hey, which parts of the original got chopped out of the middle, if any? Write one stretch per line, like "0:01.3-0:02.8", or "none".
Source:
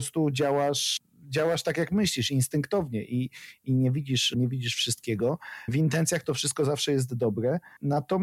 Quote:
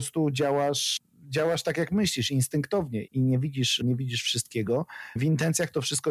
0:03.0-0:03.6